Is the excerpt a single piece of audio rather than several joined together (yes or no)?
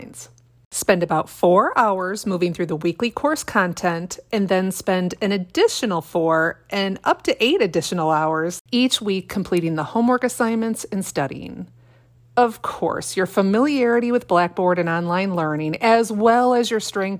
yes